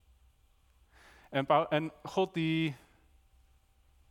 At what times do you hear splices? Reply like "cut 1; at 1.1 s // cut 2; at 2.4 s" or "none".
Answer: none